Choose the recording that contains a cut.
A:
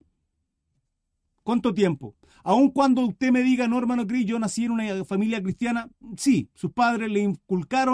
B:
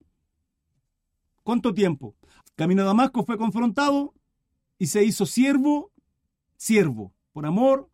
B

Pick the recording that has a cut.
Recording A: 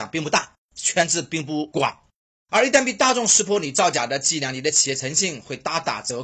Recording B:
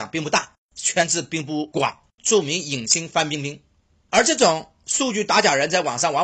B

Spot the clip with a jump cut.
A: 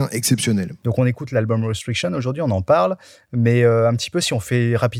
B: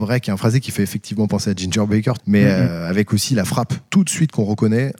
B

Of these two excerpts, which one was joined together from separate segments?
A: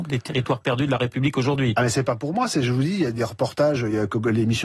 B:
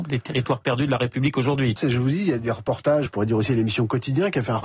B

